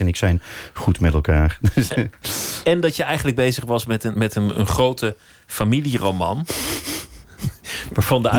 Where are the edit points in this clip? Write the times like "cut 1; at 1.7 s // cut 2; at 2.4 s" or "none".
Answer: none